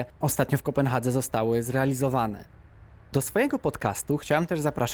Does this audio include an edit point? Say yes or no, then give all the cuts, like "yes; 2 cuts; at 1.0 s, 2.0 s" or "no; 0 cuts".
no; 0 cuts